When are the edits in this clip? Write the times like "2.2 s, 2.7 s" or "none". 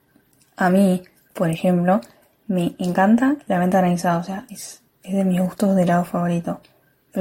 none